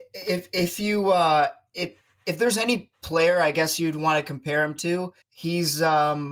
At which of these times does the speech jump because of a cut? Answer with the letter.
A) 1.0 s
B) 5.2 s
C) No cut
B